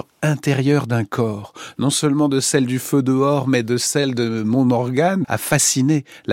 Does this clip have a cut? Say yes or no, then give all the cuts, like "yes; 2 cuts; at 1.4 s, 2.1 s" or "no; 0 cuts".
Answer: yes; 1 cut; at 5.2 s